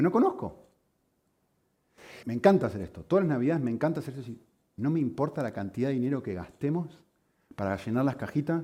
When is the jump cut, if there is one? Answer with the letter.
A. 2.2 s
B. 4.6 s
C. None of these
A